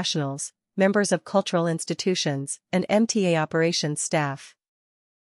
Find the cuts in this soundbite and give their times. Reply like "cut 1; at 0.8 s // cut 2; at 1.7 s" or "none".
cut 1; at 2.7 s